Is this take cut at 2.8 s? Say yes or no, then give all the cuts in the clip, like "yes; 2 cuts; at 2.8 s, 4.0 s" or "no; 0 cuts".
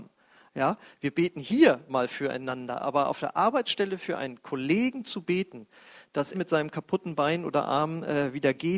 no; 1 cut; at 6.3 s